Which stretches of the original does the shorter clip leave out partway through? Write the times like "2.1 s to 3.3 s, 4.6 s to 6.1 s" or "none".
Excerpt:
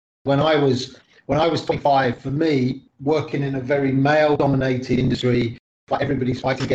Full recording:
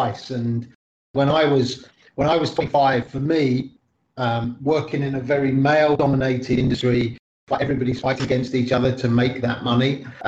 3.9 s to 4.6 s

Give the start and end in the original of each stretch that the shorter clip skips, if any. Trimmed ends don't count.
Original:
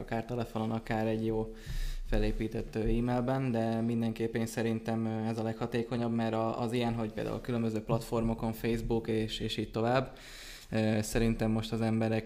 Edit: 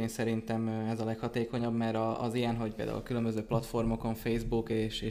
none

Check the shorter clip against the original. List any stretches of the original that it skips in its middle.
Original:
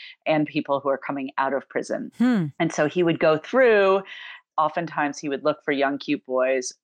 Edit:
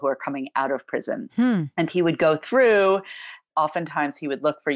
2.7 s to 2.9 s

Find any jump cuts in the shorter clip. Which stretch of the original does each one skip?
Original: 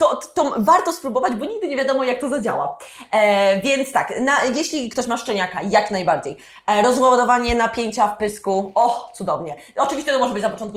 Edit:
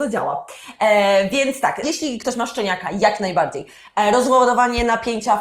4.1 s to 4.5 s

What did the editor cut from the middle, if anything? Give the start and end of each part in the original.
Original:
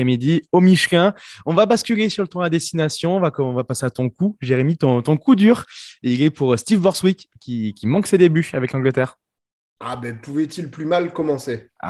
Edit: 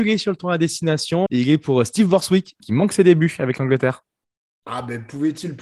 3.2 s to 6.0 s, 7.3 s to 7.7 s

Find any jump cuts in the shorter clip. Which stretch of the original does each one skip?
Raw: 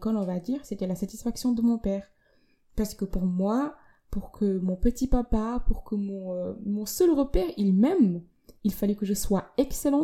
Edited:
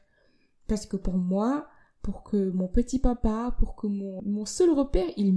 6.3 s to 6.6 s

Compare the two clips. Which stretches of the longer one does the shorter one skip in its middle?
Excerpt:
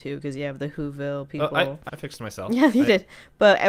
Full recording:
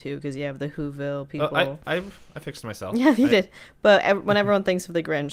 1.9 s to 2.3 s

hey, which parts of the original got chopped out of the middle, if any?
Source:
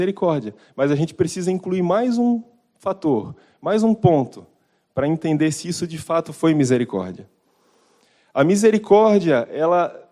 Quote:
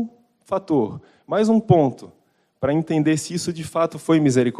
none

